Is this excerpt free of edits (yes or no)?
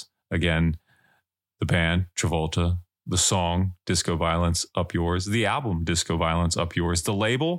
yes